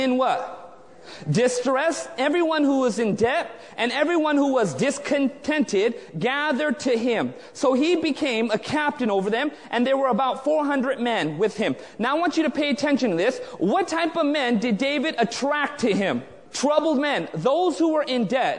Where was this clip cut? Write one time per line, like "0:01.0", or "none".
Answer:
0:16.4